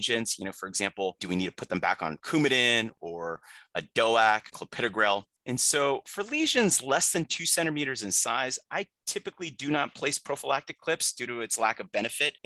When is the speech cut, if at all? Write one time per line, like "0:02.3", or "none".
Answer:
0:04.5